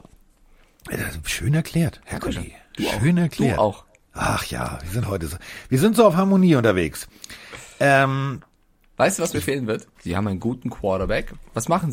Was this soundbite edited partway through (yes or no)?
yes